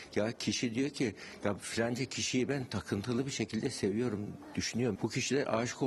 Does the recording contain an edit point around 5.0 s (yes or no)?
yes